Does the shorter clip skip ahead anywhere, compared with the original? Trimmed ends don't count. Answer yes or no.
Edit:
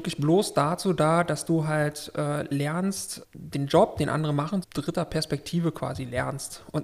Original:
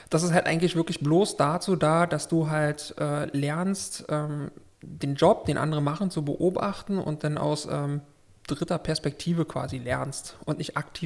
yes